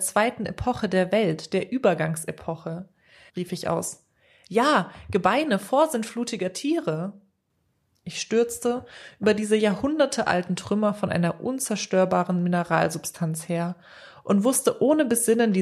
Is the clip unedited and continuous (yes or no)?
no